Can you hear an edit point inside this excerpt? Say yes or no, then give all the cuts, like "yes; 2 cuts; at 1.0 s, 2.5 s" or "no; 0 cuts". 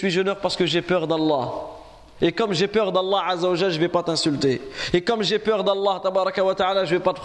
no; 0 cuts